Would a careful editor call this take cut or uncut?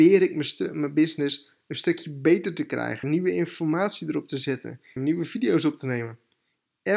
cut